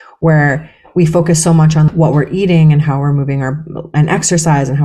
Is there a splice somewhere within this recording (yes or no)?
yes